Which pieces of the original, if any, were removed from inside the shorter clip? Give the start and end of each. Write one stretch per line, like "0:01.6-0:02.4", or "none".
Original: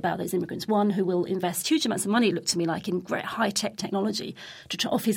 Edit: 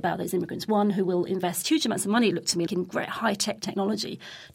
0:02.7-0:02.8